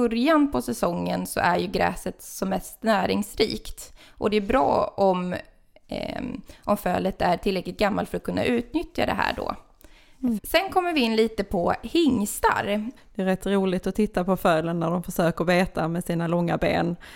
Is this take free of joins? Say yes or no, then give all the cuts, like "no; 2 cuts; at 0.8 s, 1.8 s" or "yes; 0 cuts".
no; 2 cuts; at 10.4 s, 13.0 s